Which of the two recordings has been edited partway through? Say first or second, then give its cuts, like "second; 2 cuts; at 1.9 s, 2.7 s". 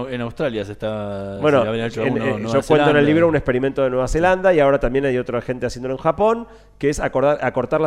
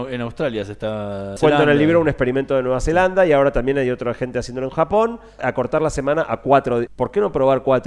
second; 3 cuts; at 1.4 s, 5.4 s, 6.9 s